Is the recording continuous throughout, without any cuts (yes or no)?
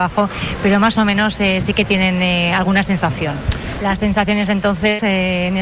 no